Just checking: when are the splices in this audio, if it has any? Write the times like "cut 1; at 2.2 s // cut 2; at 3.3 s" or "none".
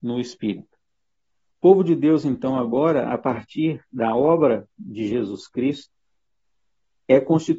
cut 1; at 1.5 s